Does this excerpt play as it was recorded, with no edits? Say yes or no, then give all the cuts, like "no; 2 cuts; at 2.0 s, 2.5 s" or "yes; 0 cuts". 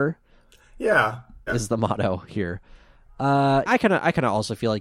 no; 2 cuts; at 1.5 s, 3.7 s